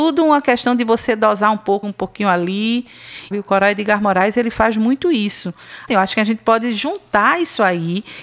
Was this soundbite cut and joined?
yes; 3 cuts; at 1.8 s, 3.3 s, 5.9 s

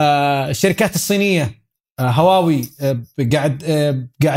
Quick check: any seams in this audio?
no; 0 cuts

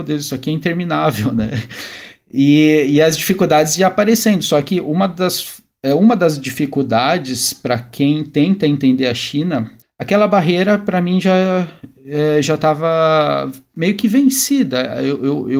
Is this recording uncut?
no; 1 cut; at 9.8 s

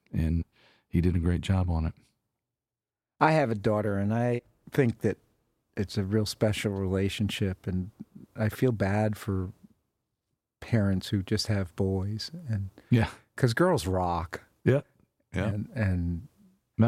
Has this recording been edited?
no; 0 cuts

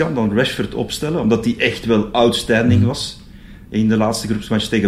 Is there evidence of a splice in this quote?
no; 0 cuts

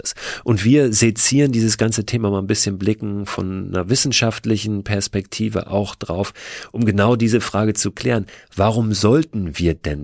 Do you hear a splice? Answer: no; 0 cuts

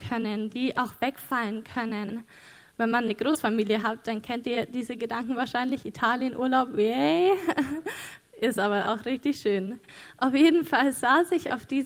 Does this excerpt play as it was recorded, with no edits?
no; 1 cut; at 2.7 s

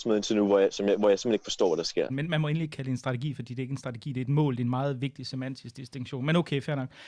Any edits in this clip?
yes; 1 cut; at 2.1 s

